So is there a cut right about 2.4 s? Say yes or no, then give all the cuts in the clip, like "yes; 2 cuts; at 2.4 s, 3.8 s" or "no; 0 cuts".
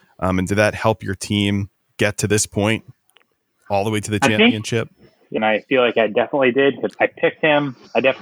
no; 2 cuts; at 5.4 s, 6.9 s